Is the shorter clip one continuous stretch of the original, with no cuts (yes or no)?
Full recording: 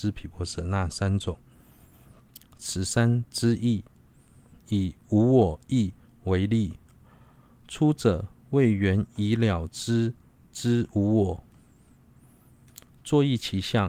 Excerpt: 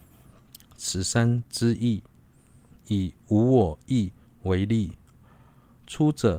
yes